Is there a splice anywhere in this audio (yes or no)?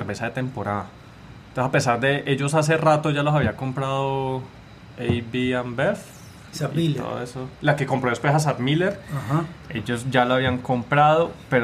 yes